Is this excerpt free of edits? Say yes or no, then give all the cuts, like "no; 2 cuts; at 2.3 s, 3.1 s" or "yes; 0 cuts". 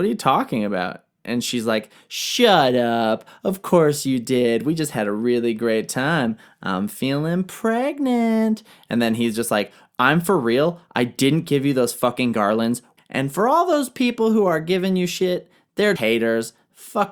no; 2 cuts; at 13.0 s, 16.0 s